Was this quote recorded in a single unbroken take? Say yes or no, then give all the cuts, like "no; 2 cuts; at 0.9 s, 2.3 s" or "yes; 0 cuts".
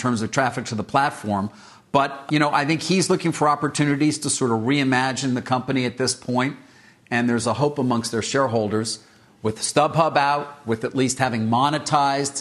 no; 1 cut; at 2.3 s